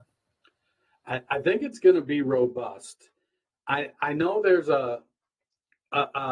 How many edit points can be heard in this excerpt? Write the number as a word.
zero